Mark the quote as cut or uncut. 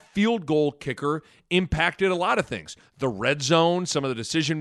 uncut